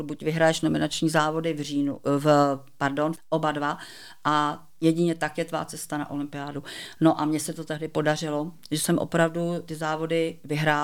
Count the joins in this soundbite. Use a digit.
1